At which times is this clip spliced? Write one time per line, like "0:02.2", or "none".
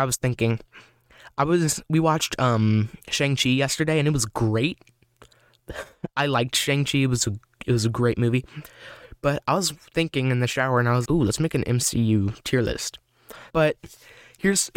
0:11.0
0:13.5